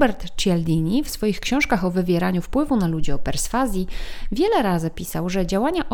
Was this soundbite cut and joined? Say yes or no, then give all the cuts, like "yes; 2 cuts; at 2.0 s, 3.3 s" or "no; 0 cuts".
no; 0 cuts